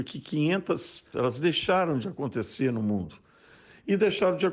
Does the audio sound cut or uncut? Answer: cut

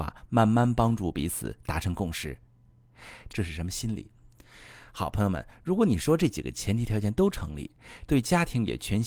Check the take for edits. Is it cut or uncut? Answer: cut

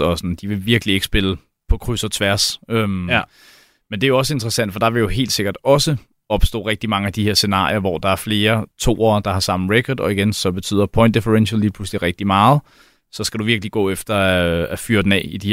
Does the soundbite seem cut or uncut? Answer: uncut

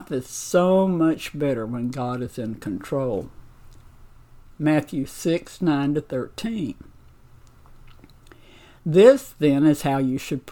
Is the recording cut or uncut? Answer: cut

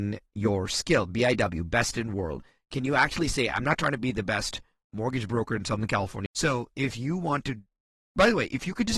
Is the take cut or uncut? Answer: cut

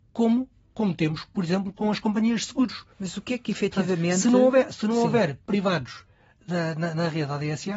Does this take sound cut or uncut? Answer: cut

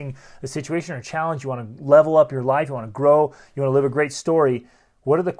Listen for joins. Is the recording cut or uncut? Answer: uncut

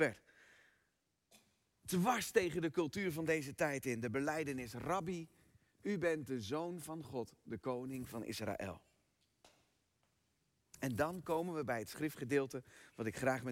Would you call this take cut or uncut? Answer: uncut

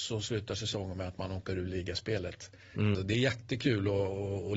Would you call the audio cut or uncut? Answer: cut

